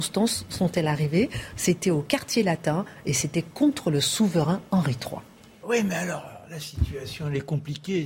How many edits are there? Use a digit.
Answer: 0